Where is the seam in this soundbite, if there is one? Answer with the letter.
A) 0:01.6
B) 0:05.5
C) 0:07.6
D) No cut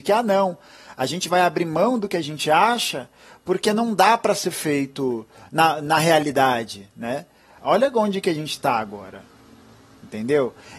C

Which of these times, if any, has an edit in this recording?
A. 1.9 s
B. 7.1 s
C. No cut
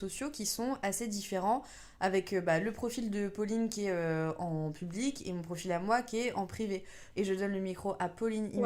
B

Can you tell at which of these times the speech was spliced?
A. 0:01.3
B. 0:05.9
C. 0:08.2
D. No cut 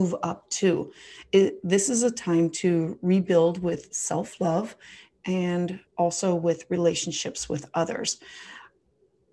B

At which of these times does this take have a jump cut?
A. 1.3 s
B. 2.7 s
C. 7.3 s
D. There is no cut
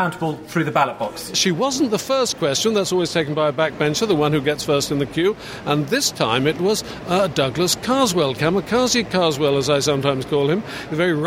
A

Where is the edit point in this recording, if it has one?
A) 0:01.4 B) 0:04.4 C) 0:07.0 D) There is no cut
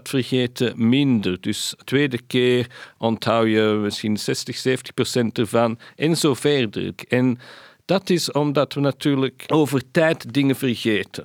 C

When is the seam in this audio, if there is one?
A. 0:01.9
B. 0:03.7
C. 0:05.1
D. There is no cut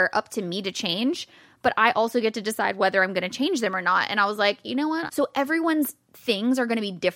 C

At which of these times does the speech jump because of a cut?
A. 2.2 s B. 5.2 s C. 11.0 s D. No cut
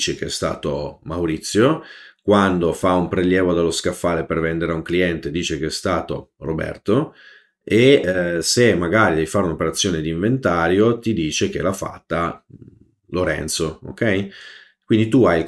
D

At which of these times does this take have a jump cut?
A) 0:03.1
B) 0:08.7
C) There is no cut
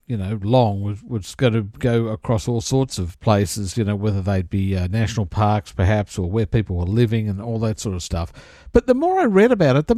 A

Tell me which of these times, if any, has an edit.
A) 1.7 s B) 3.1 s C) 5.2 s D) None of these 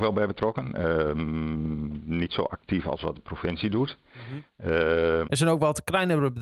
C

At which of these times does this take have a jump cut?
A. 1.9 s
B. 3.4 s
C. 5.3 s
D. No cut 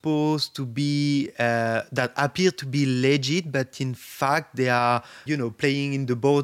C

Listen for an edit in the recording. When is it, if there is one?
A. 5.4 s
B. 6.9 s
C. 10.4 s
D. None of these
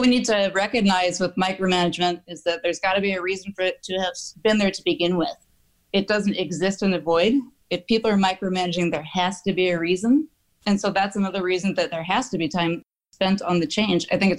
D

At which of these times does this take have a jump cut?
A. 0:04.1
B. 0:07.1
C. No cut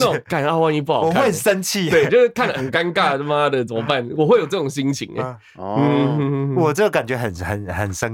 C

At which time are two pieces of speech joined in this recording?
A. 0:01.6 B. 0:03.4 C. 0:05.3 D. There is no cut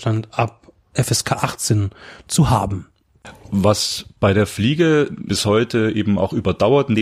C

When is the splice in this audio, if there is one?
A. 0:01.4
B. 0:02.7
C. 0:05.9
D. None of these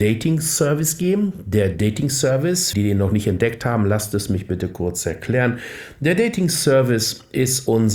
B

